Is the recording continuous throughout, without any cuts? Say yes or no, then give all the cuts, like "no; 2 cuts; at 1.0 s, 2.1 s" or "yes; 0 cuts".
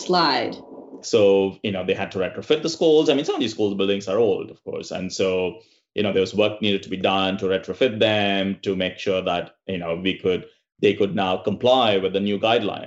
no; 1 cut; at 1.0 s